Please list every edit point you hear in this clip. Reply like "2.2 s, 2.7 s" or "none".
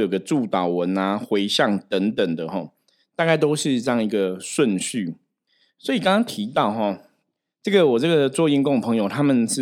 none